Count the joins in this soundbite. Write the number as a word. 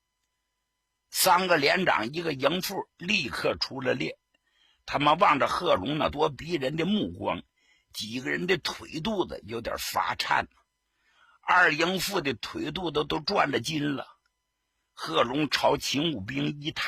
one